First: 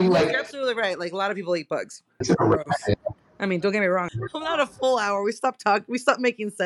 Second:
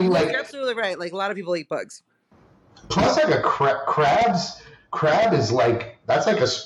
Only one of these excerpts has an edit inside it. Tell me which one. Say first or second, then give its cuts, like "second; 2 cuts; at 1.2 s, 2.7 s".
first; 2 cuts; at 2.2 s, 4.1 s